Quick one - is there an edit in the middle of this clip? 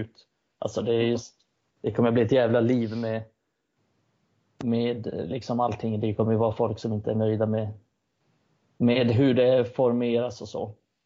no; 0 cuts

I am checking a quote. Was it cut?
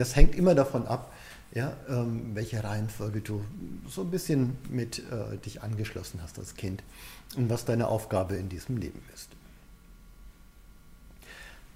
no; 0 cuts

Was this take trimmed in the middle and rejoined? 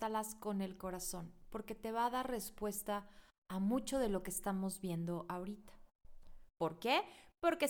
yes; 1 cut; at 6.5 s

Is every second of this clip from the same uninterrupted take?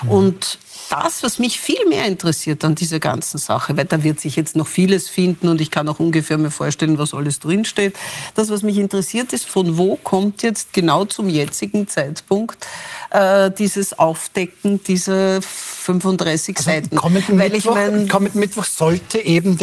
yes; 0 cuts

